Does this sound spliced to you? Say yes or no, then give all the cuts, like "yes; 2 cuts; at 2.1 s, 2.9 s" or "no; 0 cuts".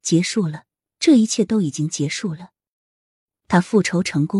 no; 0 cuts